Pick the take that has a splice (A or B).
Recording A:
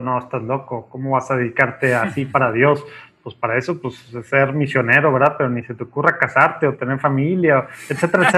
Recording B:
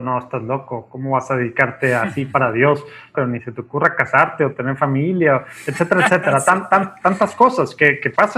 B